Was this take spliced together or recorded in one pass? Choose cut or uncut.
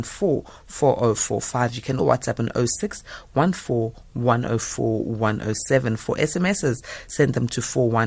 cut